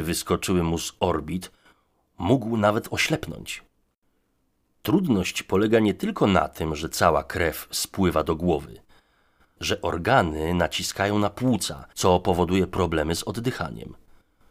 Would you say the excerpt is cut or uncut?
cut